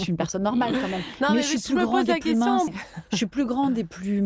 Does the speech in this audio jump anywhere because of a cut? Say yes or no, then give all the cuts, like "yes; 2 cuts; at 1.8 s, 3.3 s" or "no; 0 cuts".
yes; 1 cut; at 2.7 s